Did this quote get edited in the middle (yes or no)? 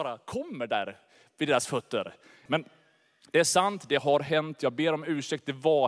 yes